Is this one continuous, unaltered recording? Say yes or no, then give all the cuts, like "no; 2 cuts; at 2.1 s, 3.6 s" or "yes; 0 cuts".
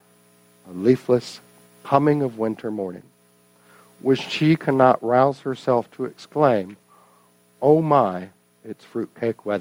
no; 1 cut; at 1.6 s